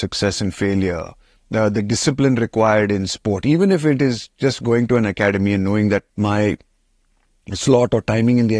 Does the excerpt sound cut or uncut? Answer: cut